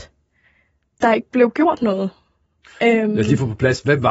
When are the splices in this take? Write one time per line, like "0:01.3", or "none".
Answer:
none